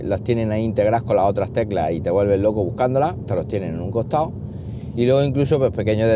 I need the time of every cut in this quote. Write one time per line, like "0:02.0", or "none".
0:03.2